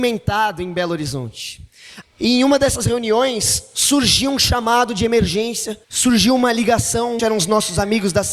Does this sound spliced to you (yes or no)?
yes